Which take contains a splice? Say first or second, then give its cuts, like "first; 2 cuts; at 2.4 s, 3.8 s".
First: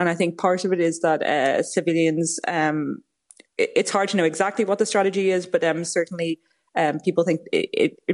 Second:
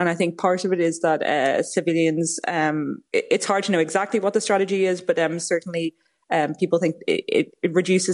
second; 1 cut; at 3.1 s